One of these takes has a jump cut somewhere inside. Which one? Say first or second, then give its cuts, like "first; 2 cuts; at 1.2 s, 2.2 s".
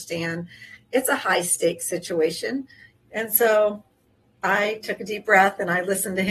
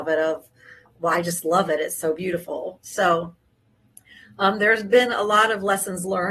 first; 1 cut; at 2.9 s